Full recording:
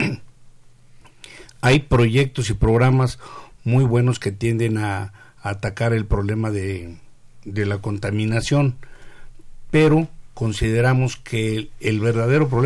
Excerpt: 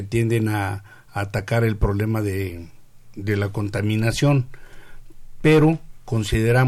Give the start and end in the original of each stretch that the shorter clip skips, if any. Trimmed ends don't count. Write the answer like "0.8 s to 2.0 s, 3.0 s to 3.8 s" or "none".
none